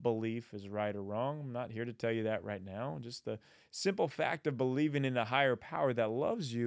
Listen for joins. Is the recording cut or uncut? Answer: uncut